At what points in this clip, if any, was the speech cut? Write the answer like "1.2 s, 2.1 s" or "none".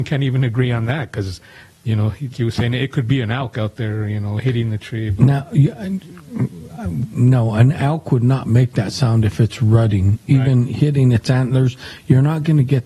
2.3 s